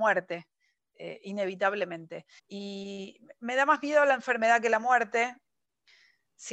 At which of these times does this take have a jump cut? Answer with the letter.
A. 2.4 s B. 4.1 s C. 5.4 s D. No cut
A